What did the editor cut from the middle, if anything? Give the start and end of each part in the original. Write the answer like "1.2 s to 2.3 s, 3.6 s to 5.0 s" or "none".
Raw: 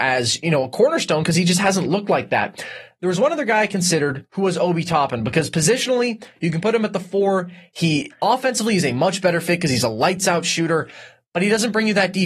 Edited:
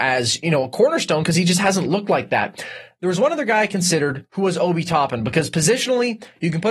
none